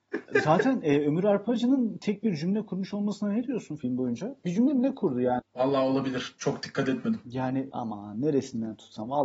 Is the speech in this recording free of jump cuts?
no; 1 cut; at 5.4 s

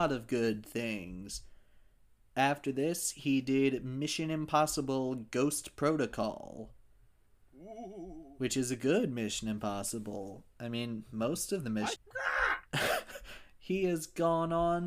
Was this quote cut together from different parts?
yes; 1 cut; at 12.0 s

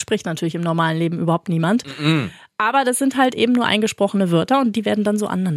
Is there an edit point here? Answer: no; 0 cuts

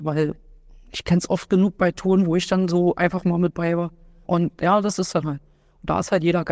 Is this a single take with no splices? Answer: no; 1 cut; at 4.2 s

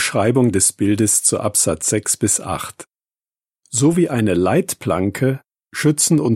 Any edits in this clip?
no; 0 cuts

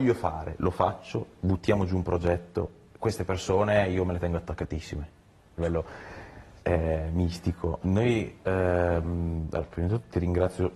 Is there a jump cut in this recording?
yes; 2 cuts; at 5.6 s, 7.8 s

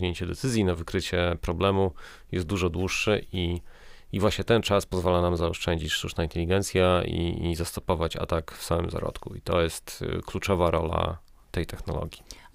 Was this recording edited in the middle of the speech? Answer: no; 0 cuts

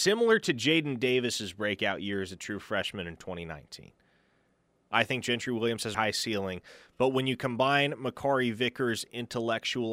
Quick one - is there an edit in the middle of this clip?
yes; 2 cuts; at 4.9 s, 5.9 s

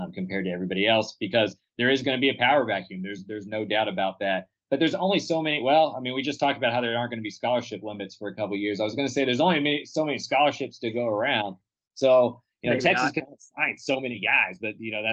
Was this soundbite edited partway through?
no; 0 cuts

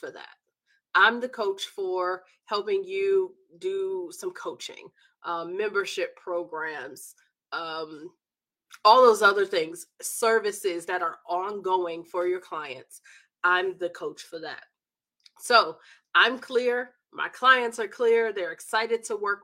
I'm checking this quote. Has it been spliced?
no; 0 cuts

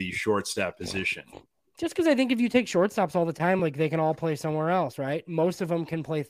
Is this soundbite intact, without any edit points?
yes; 0 cuts

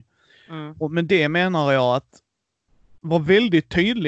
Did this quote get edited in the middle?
no; 0 cuts

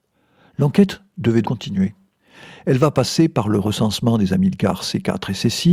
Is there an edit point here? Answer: yes; 1 cut; at 1.4 s

